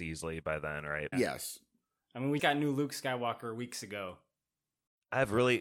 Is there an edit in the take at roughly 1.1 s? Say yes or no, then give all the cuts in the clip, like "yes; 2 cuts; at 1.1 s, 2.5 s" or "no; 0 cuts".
yes; 2 cuts; at 1.1 s, 2.4 s